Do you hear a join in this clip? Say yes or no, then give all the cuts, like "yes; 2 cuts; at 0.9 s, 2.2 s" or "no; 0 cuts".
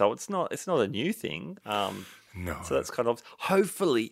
no; 0 cuts